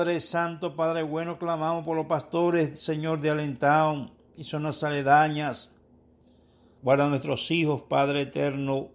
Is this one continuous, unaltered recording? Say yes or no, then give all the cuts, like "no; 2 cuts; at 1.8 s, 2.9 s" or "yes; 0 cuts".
no; 1 cut; at 6.8 s